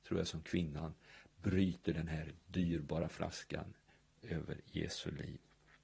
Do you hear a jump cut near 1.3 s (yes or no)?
no